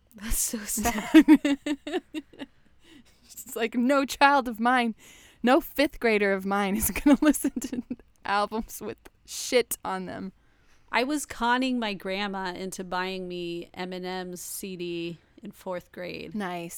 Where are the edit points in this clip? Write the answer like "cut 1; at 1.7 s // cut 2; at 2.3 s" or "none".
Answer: none